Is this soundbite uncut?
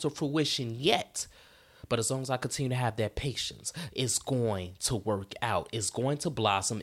no; 1 cut; at 3.9 s

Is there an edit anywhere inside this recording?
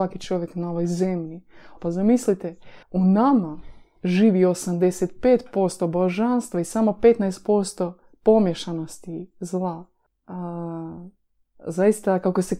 yes; 3 cuts; at 1.8 s, 2.8 s, 10.1 s

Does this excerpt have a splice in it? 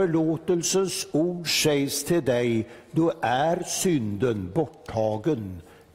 no; 0 cuts

